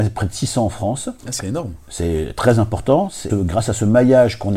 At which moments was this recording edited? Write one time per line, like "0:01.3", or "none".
0:01.2
0:03.3

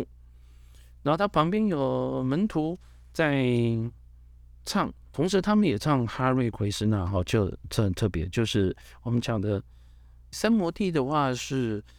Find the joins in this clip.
0:10.3

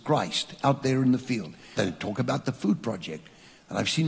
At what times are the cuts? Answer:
0:01.8

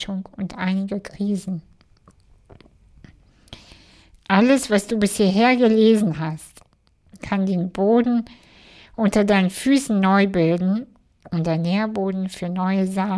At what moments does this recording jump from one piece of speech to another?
none

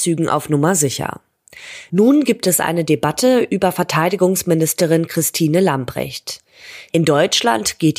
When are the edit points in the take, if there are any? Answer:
0:06.9

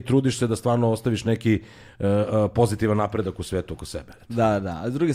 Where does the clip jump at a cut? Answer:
none

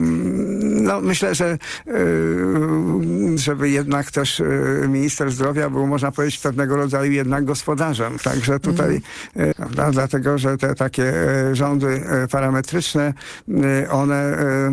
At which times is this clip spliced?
0:03.4
0:08.2
0:09.5

